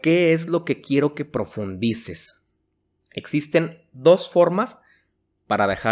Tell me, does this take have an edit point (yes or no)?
yes